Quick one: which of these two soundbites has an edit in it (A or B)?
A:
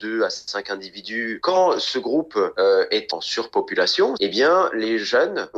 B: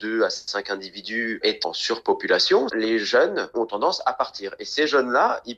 B